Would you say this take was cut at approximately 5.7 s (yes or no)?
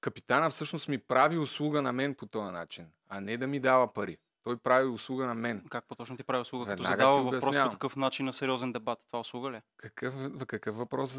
no